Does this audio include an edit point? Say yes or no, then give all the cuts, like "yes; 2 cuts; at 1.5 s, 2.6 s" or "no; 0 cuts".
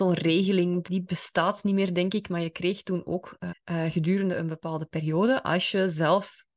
yes; 1 cut; at 3.5 s